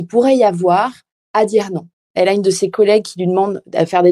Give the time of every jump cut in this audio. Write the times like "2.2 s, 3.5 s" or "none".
2.1 s